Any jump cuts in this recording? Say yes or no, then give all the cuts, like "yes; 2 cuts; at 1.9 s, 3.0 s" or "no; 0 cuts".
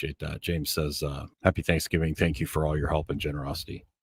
yes; 1 cut; at 1.3 s